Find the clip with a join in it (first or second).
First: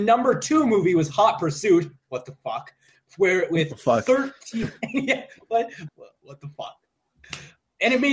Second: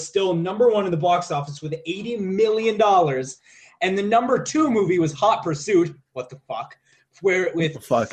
first